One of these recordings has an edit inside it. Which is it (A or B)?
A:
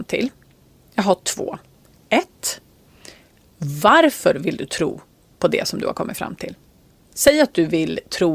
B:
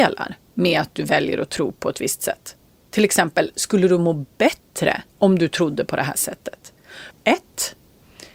B